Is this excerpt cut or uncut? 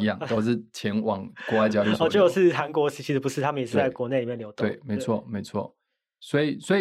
uncut